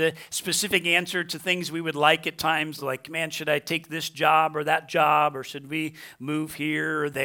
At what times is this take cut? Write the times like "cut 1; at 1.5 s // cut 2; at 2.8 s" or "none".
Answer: none